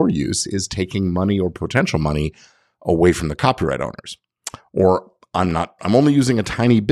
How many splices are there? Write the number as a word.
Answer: zero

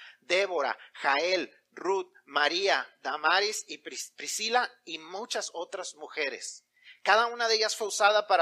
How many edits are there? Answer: zero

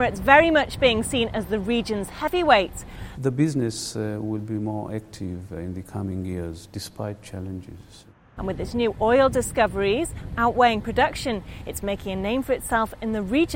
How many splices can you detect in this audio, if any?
two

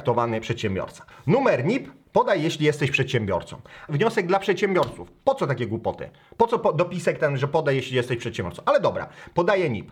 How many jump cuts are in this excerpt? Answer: two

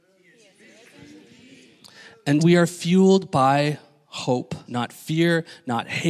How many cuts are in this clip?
two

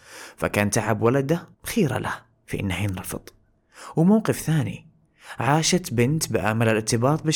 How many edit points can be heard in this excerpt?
one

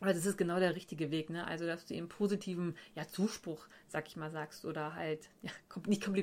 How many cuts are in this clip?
zero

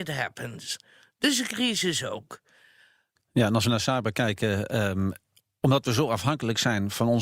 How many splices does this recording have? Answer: one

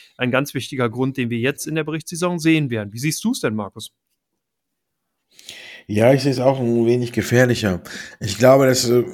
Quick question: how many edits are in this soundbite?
zero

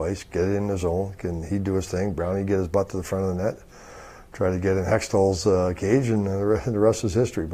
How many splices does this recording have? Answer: one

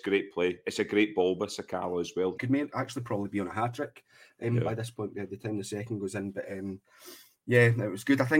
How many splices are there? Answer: one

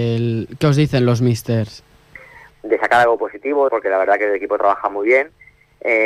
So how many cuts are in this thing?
two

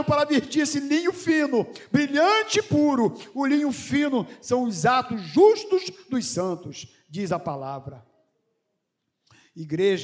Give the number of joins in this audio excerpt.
zero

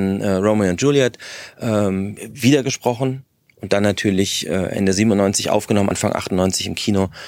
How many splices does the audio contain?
zero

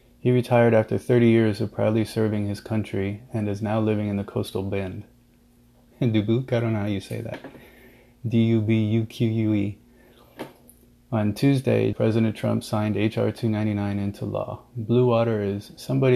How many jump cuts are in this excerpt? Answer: two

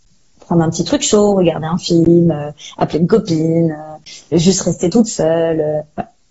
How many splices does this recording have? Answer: one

